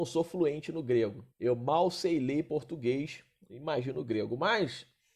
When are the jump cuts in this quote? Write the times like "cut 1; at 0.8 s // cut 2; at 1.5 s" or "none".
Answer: cut 1; at 1.3 s